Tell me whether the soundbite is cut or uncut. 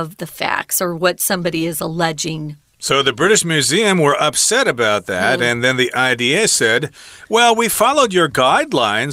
uncut